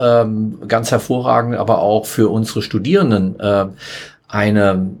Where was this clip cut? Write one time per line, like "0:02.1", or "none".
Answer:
none